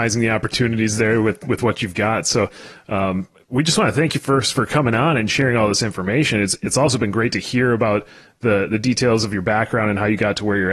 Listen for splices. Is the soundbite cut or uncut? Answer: uncut